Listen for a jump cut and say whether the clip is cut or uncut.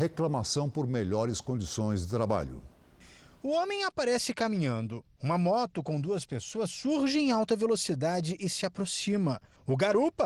uncut